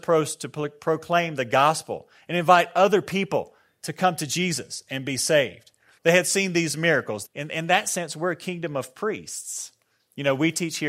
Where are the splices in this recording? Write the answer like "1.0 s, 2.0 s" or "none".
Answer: 6.0 s, 7.2 s